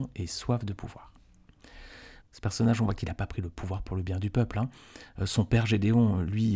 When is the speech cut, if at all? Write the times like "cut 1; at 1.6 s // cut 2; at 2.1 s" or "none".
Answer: cut 1; at 2.2 s